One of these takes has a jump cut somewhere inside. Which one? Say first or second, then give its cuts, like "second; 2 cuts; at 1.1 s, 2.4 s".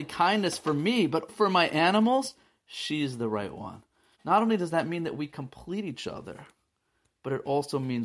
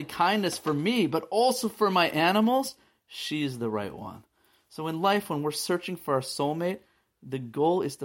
first; 2 cuts; at 1.3 s, 4.1 s